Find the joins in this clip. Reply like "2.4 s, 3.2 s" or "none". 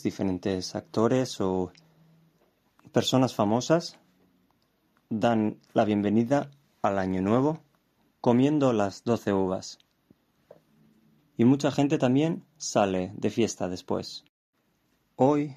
11.2 s